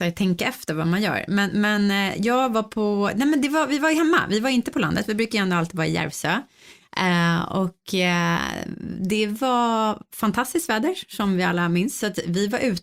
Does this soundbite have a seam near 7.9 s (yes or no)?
no